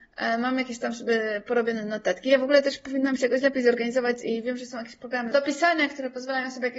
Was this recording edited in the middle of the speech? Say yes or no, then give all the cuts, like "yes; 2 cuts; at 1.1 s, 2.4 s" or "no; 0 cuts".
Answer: no; 0 cuts